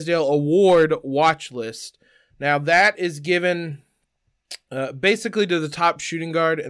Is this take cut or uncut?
uncut